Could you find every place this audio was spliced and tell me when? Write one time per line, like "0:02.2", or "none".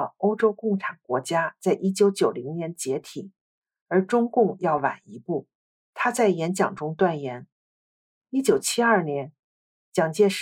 0:05.7
0:08.2